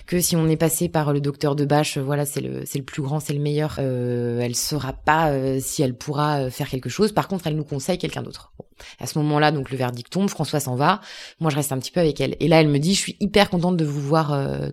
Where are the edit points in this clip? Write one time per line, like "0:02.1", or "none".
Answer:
none